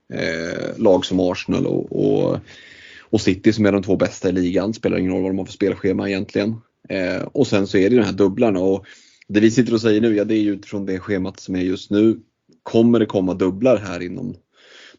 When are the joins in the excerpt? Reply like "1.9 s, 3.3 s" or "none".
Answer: none